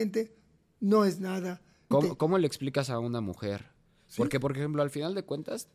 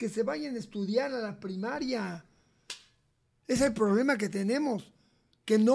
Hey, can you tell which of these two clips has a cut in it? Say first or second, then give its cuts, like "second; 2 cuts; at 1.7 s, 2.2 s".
first; 1 cut; at 1.9 s